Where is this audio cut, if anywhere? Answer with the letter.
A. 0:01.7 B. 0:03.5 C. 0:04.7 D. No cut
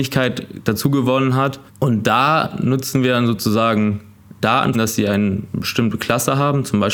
C